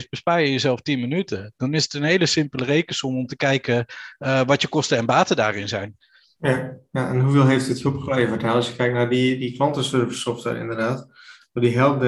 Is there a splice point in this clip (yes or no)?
no